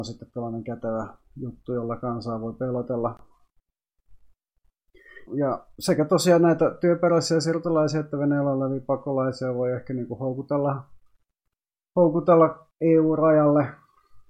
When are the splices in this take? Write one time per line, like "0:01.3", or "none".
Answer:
0:05.3